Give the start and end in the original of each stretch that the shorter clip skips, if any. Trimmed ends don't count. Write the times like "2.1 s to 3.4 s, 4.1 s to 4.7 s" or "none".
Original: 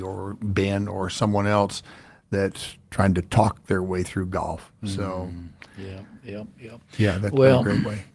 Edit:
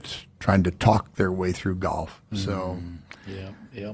none